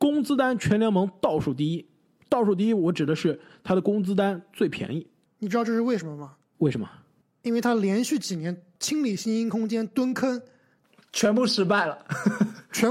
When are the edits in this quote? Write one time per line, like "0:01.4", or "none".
none